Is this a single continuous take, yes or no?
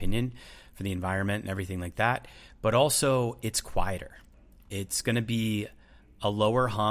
yes